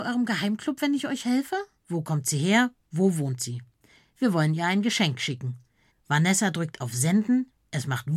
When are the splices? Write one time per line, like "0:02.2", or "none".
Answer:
0:01.8
0:05.9